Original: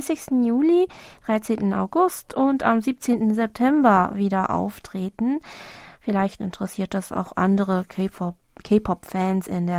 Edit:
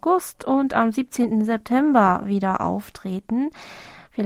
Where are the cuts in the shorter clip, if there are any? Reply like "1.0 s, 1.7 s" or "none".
none